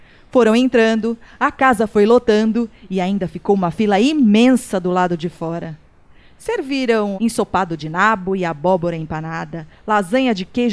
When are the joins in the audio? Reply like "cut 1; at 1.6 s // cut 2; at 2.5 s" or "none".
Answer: cut 1; at 7.1 s